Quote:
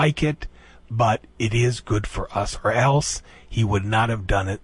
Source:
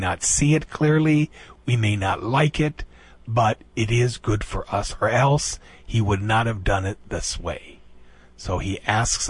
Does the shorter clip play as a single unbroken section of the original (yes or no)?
yes